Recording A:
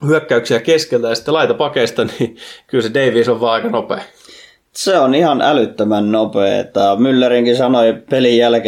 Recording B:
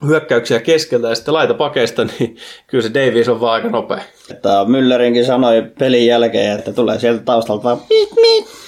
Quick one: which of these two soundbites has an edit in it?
B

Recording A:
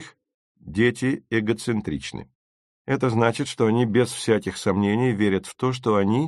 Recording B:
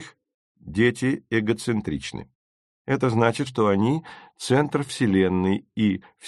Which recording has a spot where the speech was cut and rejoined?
B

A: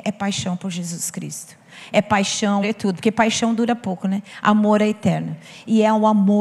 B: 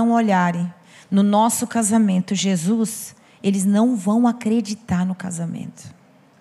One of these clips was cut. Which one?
A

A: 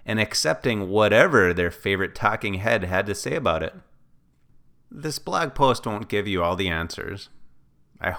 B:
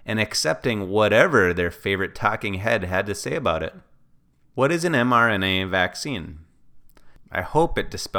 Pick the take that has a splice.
B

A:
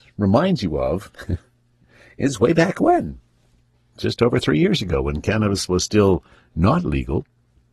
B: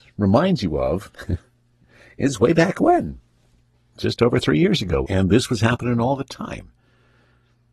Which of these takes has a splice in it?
B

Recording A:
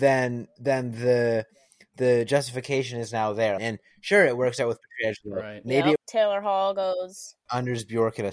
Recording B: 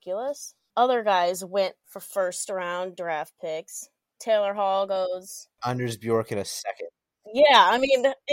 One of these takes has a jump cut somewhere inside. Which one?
A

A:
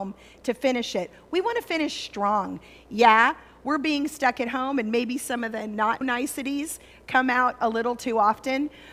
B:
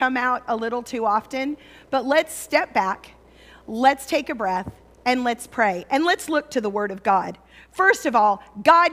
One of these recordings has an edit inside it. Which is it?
A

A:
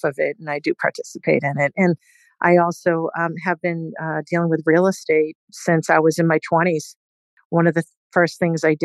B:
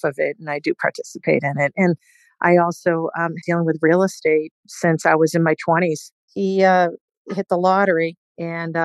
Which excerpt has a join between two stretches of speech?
B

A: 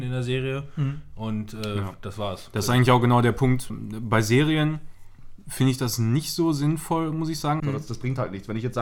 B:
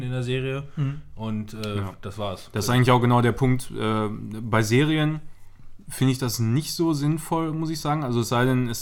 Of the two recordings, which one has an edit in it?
A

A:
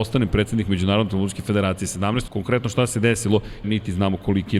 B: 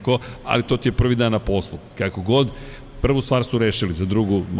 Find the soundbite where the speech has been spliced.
A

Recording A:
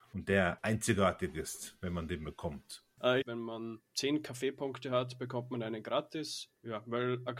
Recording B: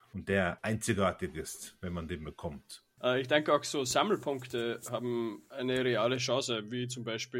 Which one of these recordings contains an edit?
A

